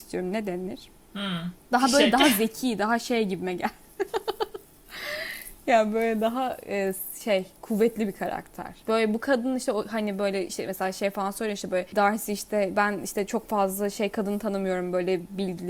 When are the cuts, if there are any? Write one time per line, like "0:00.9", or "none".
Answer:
none